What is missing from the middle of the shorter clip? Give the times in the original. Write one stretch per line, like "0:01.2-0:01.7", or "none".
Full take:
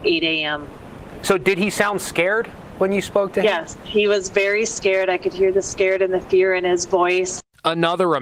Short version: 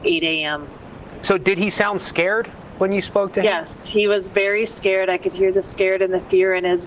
none